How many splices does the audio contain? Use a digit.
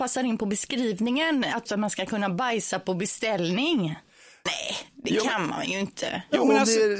2